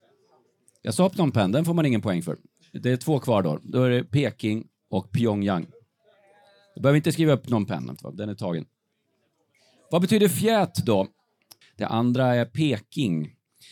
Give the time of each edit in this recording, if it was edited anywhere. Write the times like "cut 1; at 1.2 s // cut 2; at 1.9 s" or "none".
cut 1; at 8.0 s // cut 2; at 11.6 s